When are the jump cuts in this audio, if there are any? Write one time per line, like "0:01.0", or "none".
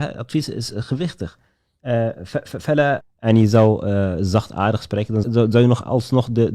0:03.0
0:05.2